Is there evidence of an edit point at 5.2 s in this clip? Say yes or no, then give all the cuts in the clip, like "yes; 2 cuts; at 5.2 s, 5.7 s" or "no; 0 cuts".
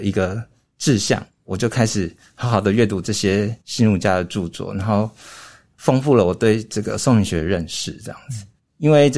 no; 0 cuts